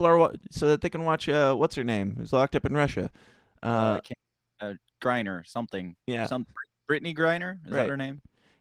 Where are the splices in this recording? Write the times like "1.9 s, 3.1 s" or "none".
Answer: none

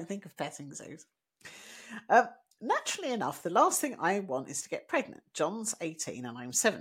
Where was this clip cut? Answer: none

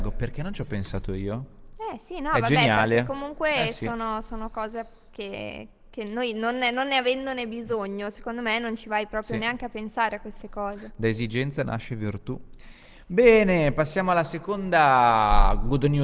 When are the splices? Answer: 12.6 s

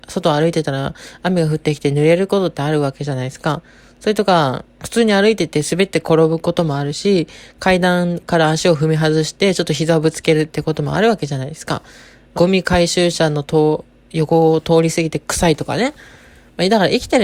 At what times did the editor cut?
12.3 s

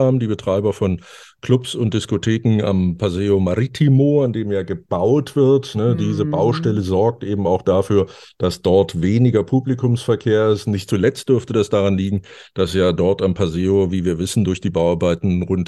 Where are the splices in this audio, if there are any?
none

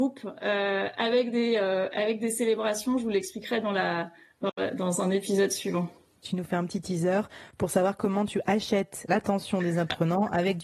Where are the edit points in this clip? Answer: 6.2 s, 9.1 s

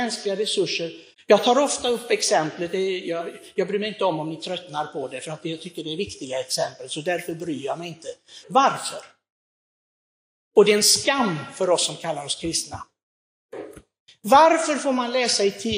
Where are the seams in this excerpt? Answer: 1.1 s, 8.4 s

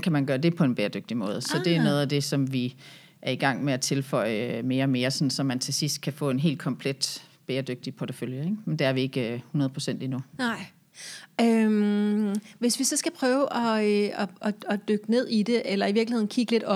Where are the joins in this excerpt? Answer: none

